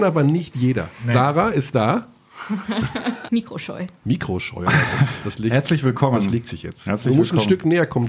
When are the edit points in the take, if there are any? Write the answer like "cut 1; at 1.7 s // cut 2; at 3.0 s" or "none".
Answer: cut 1; at 3.3 s